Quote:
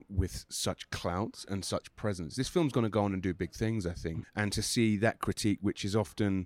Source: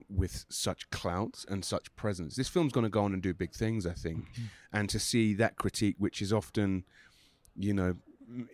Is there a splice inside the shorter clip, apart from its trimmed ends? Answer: yes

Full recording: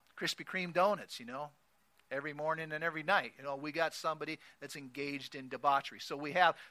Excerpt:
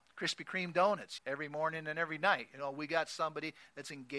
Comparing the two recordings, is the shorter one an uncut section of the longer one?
no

